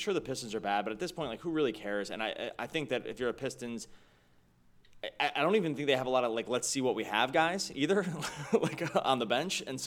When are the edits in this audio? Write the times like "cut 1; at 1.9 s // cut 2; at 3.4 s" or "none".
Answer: none